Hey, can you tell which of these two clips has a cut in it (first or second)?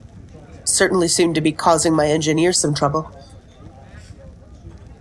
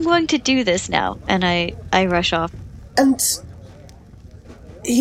second